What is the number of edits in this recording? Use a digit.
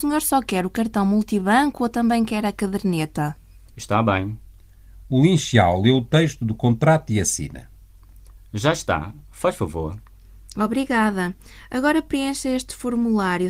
1